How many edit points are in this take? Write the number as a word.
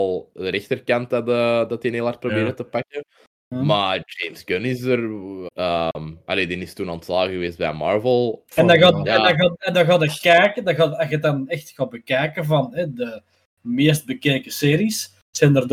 two